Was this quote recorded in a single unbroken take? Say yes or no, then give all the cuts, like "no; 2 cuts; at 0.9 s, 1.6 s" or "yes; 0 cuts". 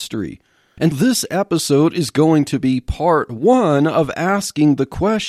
no; 1 cut; at 0.9 s